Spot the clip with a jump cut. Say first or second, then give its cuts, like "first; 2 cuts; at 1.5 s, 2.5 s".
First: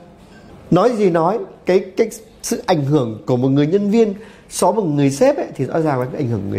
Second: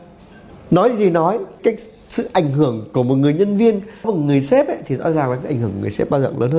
second; 2 cuts; at 1.6 s, 4.0 s